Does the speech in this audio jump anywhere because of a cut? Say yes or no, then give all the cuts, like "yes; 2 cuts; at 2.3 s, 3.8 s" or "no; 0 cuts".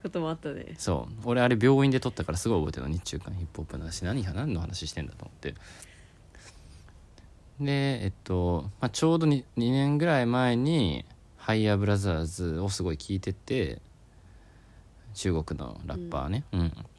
no; 0 cuts